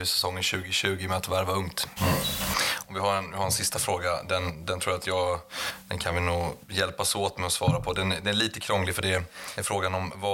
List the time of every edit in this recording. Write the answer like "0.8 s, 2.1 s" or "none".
2.0 s